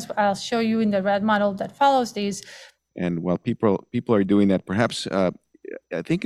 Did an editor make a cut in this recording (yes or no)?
yes